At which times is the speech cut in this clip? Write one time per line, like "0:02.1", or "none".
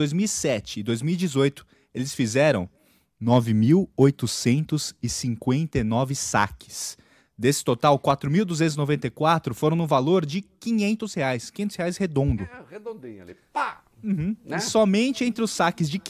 none